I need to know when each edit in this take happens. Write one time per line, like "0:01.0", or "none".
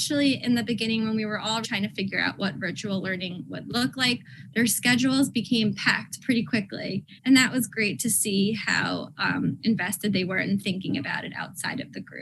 0:01.6
0:07.2